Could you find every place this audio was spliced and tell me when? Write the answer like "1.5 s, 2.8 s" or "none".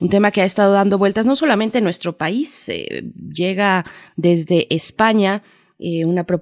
none